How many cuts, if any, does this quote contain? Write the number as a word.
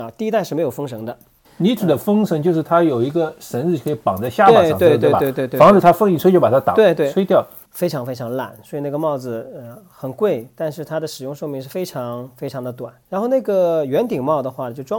three